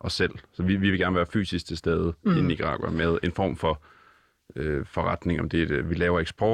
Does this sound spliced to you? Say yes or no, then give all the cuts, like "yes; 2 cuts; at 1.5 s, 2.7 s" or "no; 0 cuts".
no; 0 cuts